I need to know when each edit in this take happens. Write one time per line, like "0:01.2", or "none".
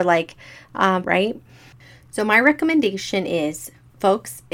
0:01.0